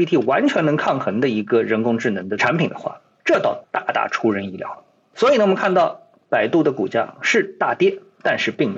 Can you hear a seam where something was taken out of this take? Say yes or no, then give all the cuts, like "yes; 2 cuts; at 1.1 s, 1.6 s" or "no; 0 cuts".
no; 0 cuts